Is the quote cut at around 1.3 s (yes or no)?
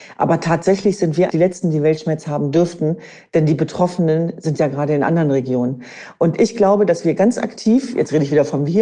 yes